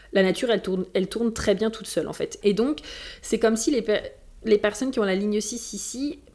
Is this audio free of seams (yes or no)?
no